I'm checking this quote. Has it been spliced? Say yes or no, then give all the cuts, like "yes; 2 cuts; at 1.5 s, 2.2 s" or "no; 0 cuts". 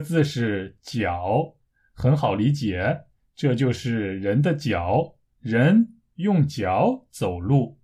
no; 0 cuts